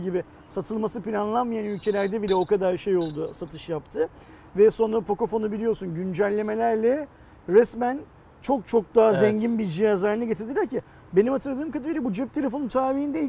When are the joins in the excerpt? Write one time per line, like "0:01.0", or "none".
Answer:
none